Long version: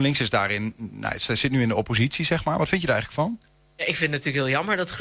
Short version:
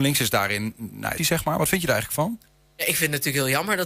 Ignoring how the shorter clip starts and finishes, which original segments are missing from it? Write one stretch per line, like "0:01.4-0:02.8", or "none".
0:01.2-0:02.2

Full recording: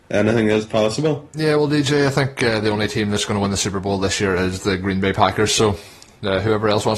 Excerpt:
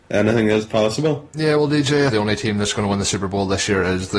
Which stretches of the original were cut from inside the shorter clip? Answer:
0:02.1-0:02.6

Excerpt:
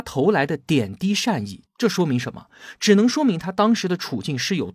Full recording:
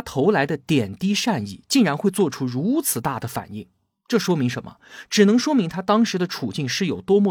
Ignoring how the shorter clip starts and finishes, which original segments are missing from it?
0:01.7-0:04.0

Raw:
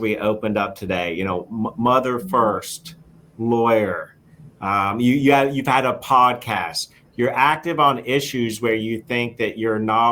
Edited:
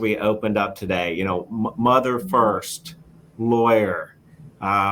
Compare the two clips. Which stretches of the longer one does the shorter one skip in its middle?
none

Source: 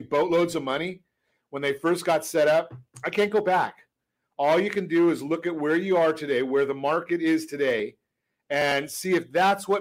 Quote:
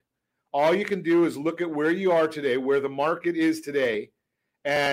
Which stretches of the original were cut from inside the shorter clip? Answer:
none

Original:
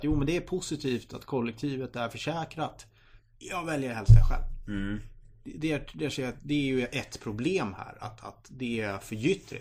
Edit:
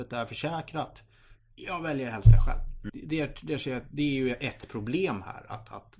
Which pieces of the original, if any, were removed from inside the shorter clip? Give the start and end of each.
0:04.7-0:05.4

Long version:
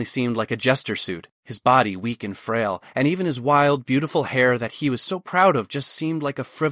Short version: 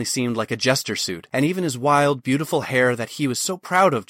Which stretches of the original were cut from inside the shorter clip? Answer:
0:01.3-0:02.9

